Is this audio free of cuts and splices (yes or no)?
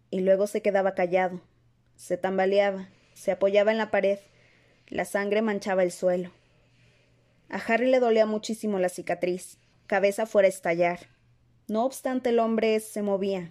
no